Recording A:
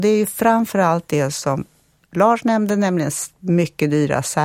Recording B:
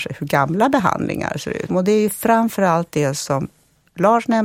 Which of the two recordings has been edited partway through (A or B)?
B